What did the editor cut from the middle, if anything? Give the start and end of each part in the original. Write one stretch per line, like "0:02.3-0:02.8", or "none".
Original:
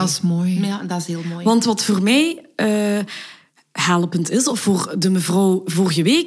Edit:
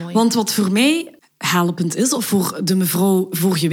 0:02.5-0:03.5